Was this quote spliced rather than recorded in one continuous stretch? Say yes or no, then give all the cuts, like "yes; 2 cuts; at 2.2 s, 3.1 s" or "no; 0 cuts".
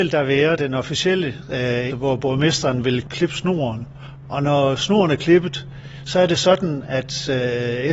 yes; 1 cut; at 1.9 s